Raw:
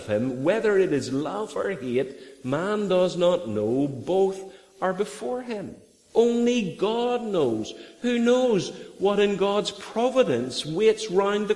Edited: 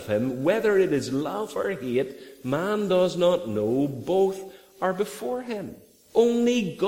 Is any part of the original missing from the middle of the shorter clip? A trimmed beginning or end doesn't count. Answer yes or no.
no